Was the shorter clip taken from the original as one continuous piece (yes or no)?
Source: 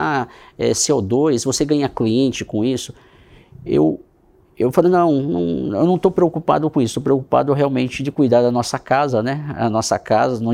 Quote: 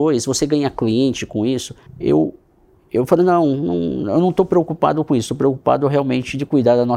no